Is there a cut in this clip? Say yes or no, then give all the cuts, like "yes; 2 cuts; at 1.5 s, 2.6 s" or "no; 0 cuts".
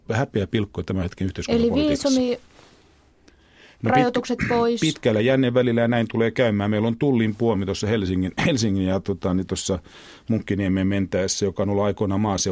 no; 0 cuts